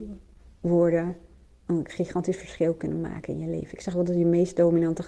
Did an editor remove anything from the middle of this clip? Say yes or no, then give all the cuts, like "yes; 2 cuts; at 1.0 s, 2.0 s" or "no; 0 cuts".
no; 0 cuts